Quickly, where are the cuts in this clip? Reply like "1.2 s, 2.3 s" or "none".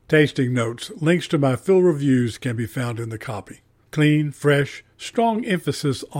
3.8 s